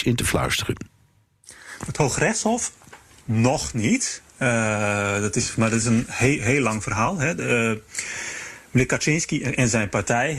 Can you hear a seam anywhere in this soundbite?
no; 0 cuts

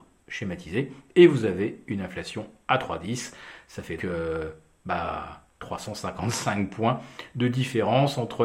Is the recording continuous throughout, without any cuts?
no; 1 cut; at 4.0 s

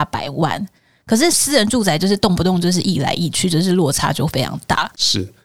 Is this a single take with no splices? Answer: yes; 0 cuts

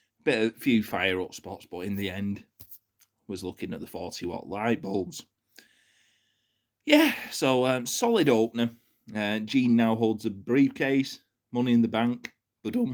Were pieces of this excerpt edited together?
no; 0 cuts

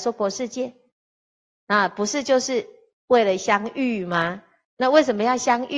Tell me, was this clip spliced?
no; 0 cuts

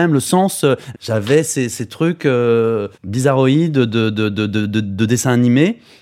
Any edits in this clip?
yes; 2 cuts; at 0.9 s, 2.9 s

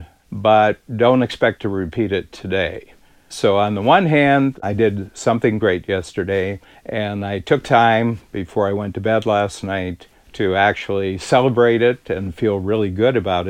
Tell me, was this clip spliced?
no; 0 cuts

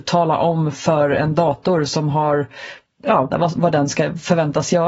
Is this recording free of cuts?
no; 1 cut; at 3.3 s

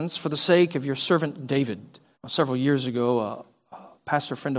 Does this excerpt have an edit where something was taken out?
yes; 1 cut; at 2.1 s

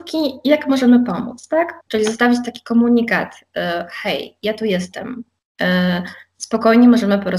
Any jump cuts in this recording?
yes; 1 cut; at 1.8 s

